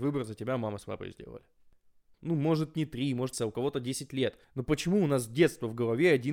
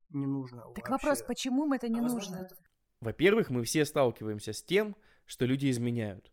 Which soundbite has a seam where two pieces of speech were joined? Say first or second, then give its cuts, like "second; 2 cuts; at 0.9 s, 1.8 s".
first; 3 cuts; at 2.1 s, 3.3 s, 4.4 s